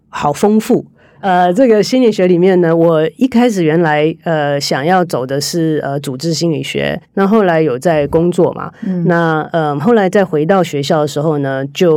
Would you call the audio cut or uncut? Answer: cut